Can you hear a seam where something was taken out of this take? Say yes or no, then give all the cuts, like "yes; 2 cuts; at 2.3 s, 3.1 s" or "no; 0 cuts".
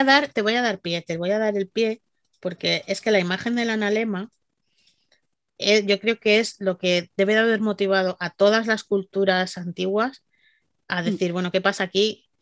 no; 0 cuts